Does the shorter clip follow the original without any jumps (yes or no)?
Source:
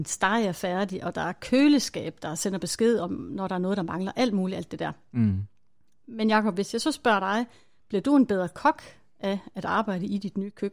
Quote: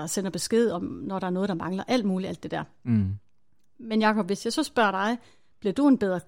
yes